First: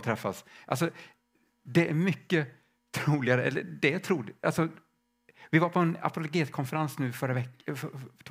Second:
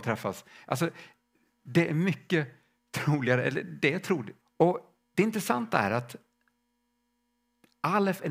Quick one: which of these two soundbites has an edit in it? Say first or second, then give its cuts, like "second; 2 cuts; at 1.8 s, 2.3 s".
second; 1 cut; at 4.4 s